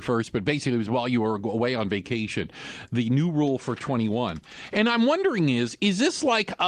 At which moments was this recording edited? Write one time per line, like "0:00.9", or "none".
none